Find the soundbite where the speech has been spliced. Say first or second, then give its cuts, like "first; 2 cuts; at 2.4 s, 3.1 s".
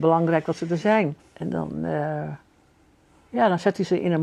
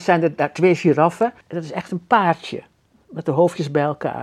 second; 1 cut; at 1.4 s